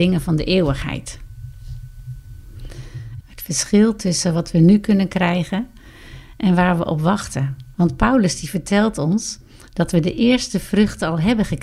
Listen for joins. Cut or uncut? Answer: cut